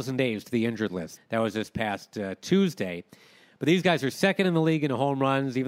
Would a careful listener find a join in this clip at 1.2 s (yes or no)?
yes